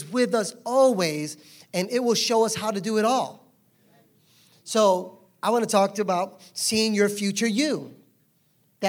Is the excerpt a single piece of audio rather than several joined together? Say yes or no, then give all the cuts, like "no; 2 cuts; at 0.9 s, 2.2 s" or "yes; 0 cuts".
yes; 0 cuts